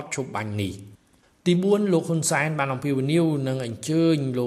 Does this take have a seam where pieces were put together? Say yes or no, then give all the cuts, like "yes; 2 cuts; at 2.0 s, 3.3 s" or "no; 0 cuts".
no; 0 cuts